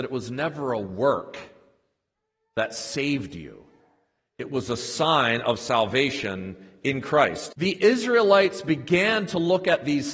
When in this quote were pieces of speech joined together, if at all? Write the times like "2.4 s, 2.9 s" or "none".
7.5 s